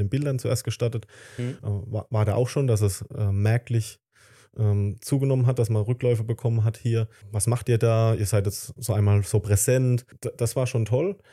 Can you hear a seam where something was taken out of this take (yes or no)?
no